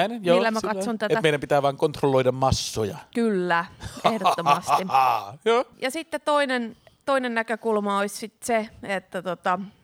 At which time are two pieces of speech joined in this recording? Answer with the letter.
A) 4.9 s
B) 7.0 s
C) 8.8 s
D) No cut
B